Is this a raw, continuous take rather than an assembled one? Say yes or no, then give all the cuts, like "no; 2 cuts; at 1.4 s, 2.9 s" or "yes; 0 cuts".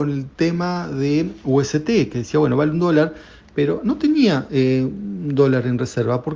yes; 0 cuts